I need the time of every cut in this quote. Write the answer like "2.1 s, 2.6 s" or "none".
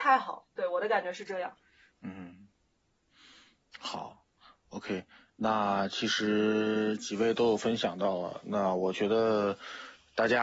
none